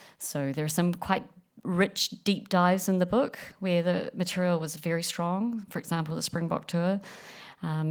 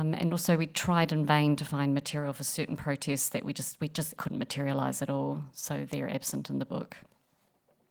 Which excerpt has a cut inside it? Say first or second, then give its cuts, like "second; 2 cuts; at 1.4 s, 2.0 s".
second; 1 cut; at 4.2 s